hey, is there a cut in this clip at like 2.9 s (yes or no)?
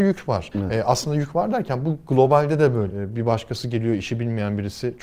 yes